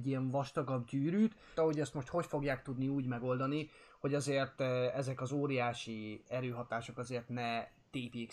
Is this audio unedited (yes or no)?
no